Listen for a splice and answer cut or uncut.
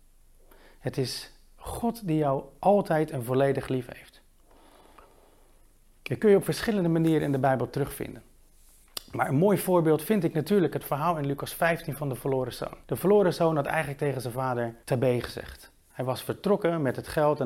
cut